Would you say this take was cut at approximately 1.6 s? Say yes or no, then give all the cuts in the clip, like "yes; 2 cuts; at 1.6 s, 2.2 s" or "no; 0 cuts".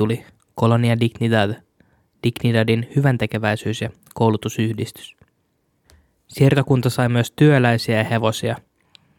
no; 0 cuts